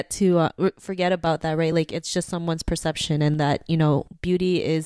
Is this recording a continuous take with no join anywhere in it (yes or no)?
yes